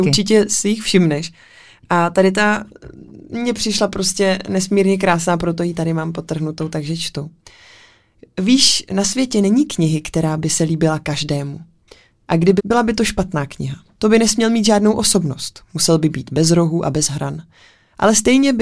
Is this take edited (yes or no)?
yes